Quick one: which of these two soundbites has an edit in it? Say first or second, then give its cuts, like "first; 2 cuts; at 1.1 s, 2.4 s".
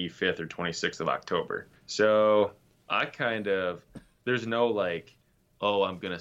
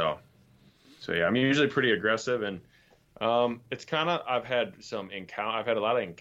first; 1 cut; at 1.8 s